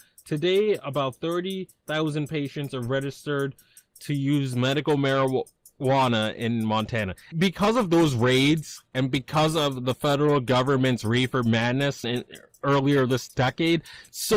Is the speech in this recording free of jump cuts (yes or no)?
no